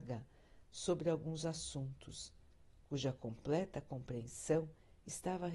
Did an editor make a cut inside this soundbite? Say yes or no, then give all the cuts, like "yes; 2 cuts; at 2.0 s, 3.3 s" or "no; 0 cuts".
no; 0 cuts